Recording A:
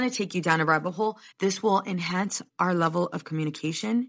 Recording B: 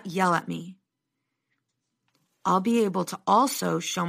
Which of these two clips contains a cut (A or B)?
A